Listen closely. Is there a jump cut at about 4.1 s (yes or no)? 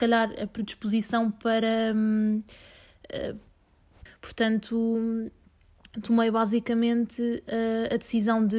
yes